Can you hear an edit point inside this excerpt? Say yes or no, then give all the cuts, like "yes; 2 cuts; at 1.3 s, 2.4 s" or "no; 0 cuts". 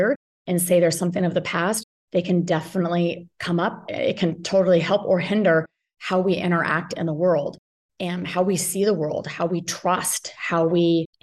no; 0 cuts